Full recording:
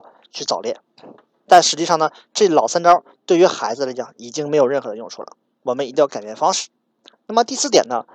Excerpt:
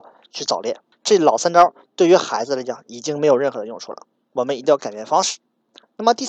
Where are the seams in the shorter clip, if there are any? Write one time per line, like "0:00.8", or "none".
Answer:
0:00.9